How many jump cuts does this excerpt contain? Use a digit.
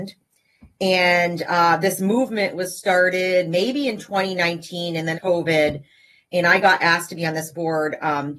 1